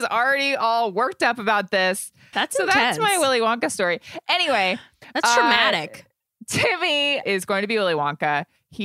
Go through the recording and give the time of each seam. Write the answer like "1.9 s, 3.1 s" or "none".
2.3 s, 7.2 s